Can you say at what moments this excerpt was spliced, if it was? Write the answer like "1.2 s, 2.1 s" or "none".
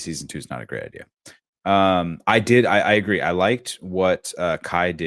none